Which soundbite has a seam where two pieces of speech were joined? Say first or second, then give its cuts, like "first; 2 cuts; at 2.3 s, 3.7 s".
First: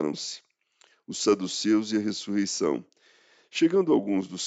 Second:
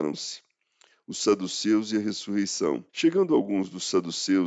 second; 1 cut; at 2.9 s